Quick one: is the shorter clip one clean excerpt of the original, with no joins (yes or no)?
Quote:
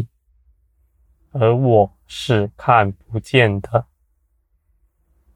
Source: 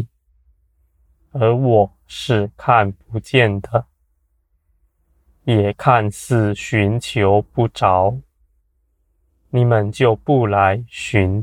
yes